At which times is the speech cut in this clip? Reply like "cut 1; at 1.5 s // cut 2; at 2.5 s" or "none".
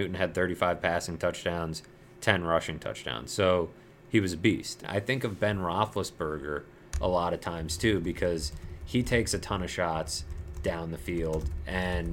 cut 1; at 4.8 s